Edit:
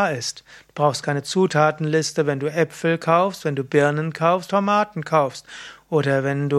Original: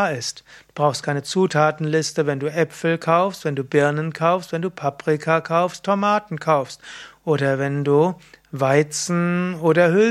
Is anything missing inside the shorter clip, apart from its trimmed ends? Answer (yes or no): yes